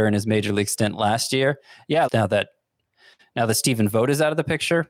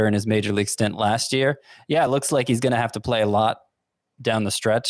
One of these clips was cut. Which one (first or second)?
first